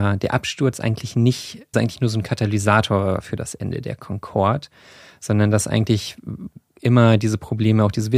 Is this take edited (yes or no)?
yes